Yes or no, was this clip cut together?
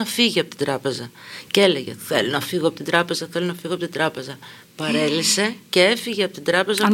no